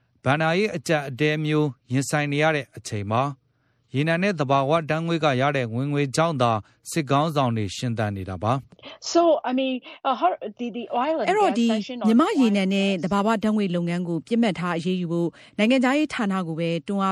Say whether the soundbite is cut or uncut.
uncut